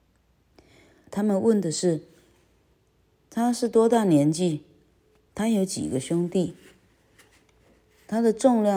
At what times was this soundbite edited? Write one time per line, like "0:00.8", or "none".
0:01.1